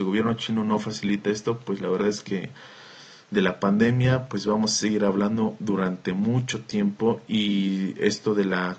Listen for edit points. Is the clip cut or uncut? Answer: uncut